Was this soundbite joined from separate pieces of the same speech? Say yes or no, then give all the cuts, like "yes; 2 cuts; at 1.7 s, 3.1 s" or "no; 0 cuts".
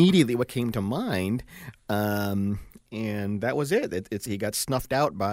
no; 0 cuts